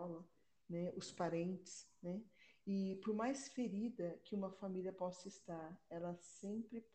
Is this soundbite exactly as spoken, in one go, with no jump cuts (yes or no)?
yes